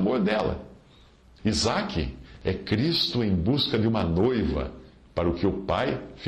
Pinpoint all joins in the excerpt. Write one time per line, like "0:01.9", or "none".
0:01.4